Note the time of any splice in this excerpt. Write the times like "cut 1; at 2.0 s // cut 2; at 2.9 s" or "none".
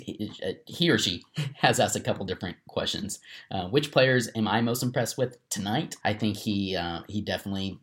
cut 1; at 6.0 s